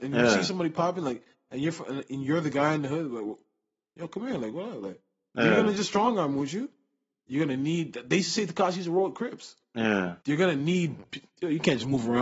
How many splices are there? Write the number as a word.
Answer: one